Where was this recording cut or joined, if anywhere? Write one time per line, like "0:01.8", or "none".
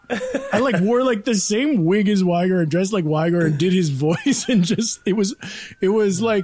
none